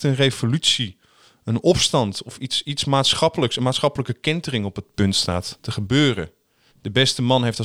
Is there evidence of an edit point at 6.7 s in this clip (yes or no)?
yes